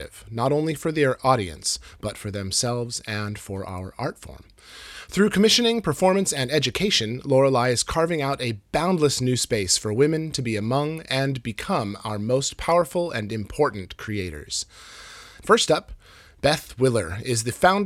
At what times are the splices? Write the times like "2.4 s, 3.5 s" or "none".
15.4 s